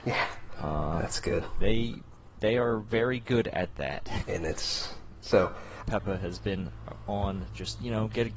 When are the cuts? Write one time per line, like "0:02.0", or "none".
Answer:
0:04.2
0:05.8